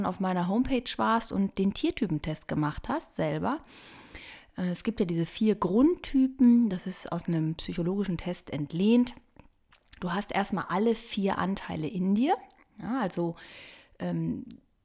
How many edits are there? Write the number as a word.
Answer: one